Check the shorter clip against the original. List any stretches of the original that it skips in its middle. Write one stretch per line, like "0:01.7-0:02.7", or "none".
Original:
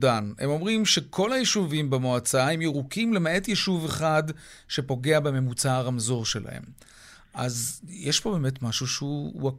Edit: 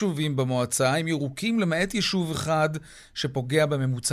none